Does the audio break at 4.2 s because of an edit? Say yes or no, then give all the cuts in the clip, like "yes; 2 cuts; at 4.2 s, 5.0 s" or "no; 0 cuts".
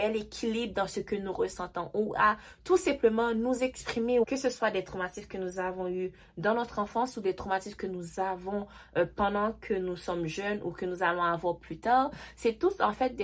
yes; 1 cut; at 4.2 s